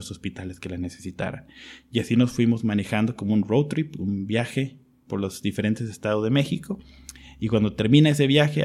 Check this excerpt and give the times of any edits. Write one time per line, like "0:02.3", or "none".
none